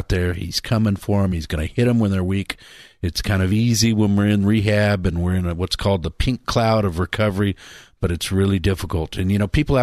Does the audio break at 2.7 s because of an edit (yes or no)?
no